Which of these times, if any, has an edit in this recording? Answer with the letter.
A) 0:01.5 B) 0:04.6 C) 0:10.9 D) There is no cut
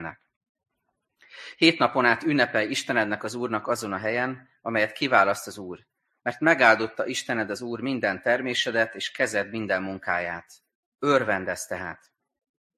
D